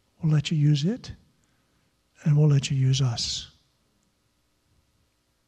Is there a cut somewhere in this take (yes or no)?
no